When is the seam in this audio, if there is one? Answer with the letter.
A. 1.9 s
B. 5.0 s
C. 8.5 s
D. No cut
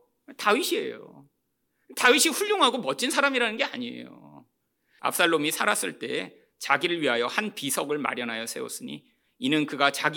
B